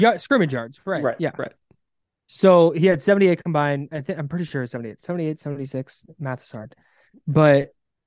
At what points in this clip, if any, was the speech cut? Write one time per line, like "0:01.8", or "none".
none